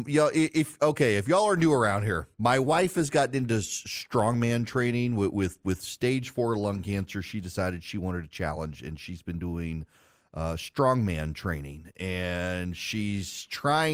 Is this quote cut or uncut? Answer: cut